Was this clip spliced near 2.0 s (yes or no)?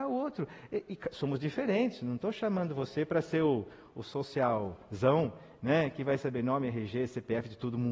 no